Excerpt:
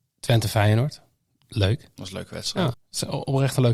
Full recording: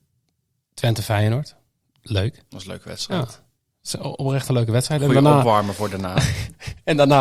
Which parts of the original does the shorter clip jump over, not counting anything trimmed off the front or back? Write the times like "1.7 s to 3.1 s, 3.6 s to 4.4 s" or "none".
3.3 s to 3.7 s